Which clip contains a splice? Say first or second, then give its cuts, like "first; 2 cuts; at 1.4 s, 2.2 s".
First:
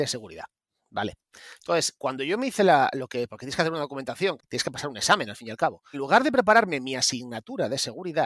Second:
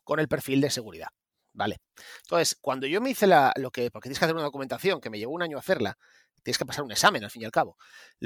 first; 2 cuts; at 4.4 s, 5.9 s